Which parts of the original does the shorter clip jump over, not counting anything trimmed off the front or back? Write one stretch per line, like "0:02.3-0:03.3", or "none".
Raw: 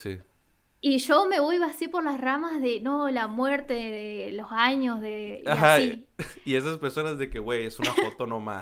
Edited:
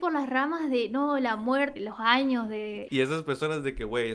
0:03.7-0:04.3
0:05.4-0:06.4